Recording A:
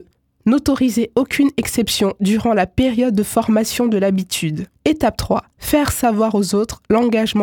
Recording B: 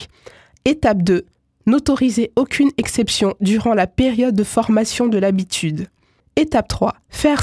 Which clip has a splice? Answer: A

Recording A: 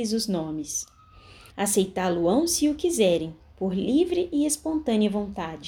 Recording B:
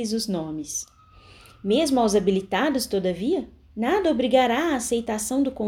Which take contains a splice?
A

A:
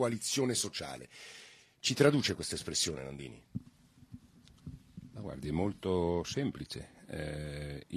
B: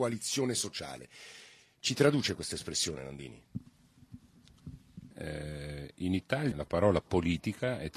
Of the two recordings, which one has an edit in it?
B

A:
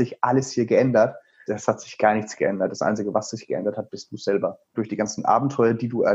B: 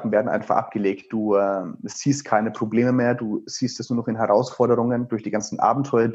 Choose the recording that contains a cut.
A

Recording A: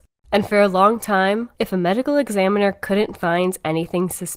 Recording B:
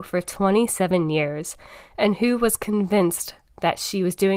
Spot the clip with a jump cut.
A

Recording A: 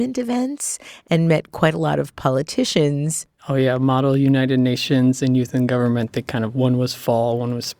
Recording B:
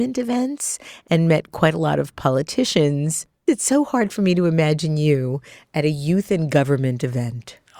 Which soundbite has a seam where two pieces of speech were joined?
A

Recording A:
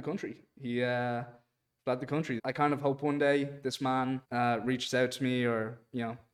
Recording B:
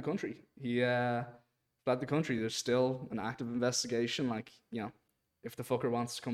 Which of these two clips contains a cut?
A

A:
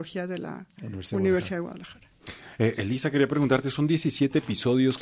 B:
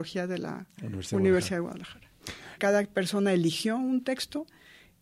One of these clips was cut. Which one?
B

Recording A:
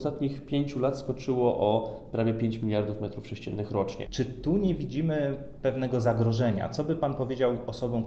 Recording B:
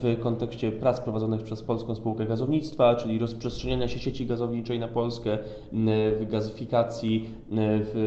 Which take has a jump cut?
A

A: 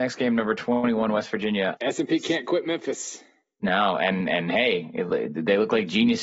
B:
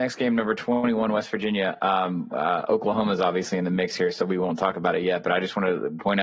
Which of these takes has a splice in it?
A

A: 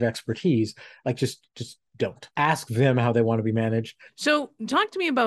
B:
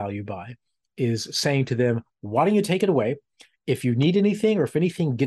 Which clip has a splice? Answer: A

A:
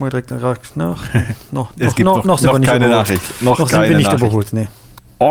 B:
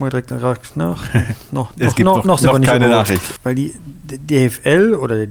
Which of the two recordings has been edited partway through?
B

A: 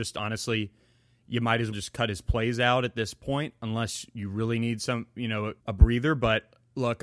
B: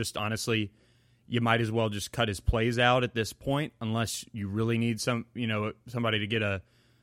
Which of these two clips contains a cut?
A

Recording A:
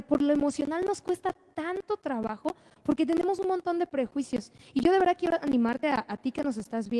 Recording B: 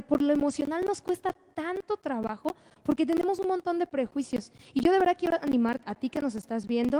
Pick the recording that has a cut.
B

